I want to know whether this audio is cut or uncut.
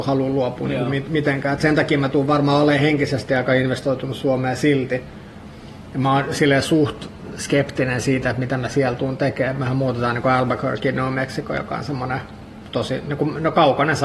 uncut